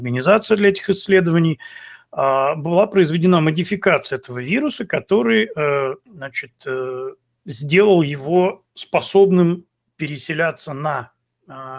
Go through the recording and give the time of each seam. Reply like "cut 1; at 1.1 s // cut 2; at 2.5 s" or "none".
cut 1; at 6.0 s // cut 2; at 8.7 s